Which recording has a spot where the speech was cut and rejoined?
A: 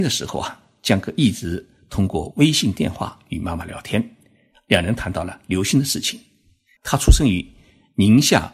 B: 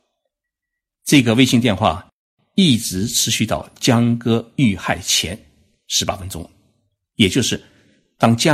A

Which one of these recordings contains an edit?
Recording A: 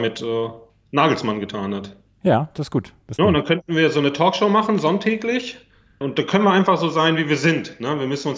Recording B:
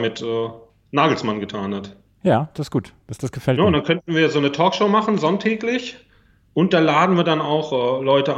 A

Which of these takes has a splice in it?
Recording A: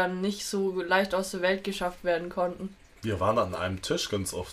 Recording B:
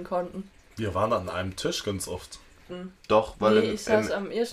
B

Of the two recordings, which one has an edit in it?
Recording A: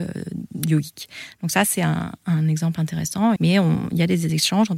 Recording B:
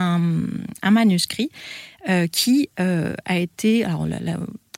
A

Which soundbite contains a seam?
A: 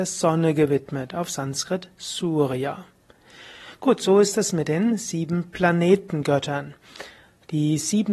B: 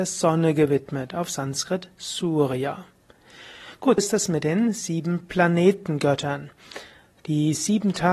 B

